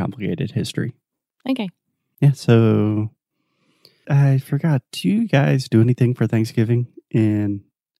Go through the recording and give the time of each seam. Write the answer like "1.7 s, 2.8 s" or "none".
4.0 s